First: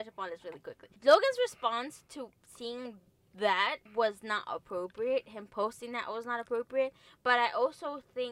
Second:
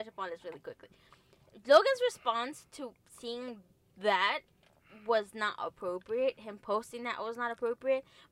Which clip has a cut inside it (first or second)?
first